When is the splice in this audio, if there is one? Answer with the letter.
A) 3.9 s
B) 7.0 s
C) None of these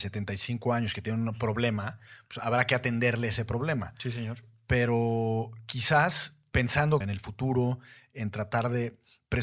B